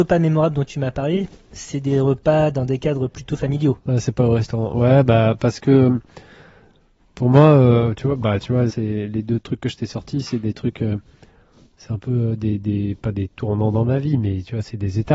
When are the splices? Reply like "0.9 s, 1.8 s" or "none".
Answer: 8.7 s